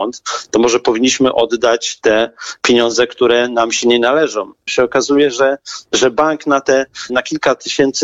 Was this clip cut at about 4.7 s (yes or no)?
yes